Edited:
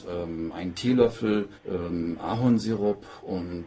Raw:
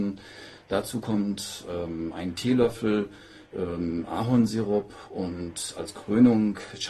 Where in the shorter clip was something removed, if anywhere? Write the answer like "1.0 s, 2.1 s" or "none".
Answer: 1.6 s